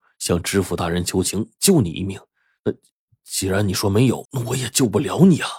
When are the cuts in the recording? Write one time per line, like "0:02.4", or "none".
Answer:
0:04.3